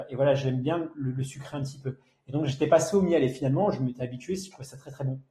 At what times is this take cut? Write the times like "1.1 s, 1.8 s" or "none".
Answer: none